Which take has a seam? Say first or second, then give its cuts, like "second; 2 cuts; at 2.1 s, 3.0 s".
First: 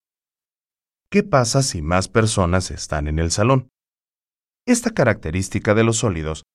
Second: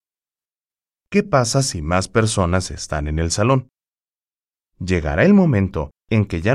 first; 1 cut; at 4.6 s